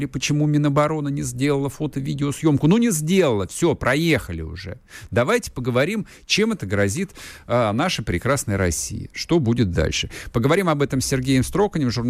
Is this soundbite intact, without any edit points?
yes; 0 cuts

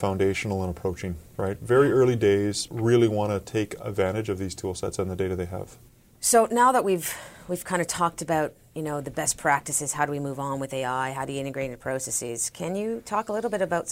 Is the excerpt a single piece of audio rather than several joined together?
no; 1 cut; at 2.7 s

